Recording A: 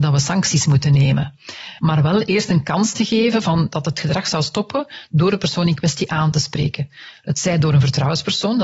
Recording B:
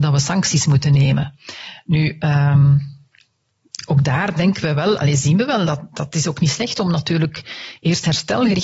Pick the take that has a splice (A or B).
A